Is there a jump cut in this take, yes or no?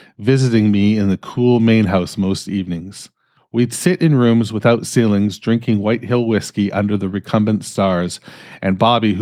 no